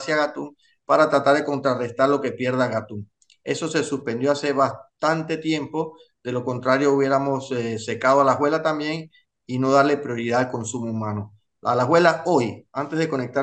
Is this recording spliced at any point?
no; 0 cuts

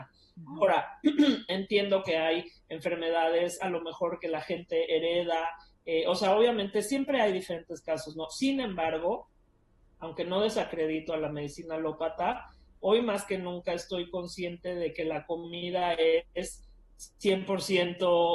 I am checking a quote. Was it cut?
no; 0 cuts

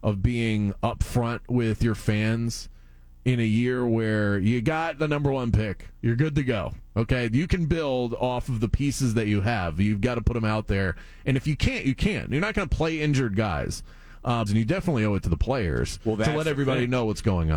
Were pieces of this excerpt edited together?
yes; 1 cut; at 14.5 s

